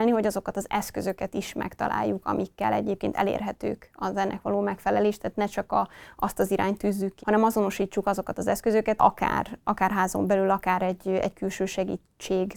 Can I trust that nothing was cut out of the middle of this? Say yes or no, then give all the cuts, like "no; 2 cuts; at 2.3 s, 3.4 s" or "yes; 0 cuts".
no; 2 cuts; at 7.2 s, 9.0 s